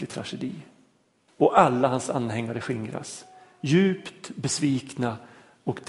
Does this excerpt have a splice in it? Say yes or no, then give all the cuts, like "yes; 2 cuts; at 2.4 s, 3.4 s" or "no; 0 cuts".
yes; 1 cut; at 1.3 s